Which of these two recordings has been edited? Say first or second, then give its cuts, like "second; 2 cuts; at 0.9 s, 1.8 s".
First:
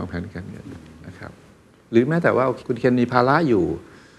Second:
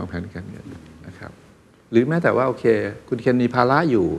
first; 1 cut; at 2.6 s